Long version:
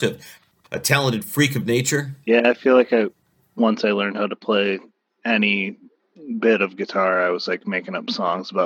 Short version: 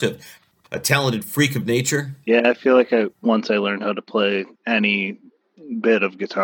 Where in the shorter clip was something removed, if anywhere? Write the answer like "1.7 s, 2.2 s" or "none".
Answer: 3.1 s, 4.6 s